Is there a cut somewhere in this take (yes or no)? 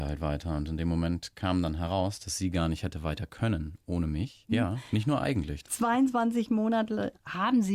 yes